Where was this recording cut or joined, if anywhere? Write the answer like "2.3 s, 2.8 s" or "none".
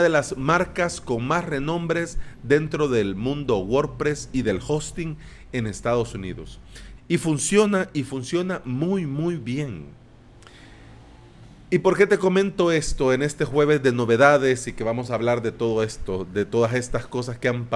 7.0 s